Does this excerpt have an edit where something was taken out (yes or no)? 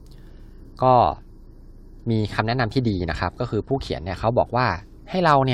no